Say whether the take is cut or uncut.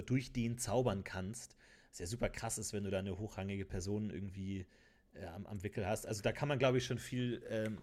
uncut